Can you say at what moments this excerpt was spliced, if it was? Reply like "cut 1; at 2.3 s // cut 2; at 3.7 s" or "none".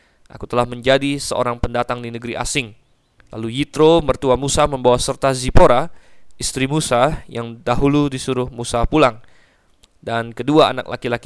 cut 1; at 3.2 s